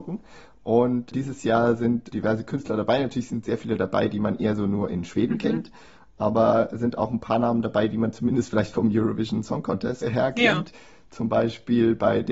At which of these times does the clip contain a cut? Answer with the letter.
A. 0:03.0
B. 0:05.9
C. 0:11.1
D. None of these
D